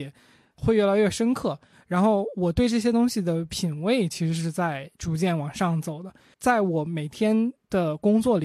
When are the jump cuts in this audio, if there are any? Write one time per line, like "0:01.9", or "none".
0:06.3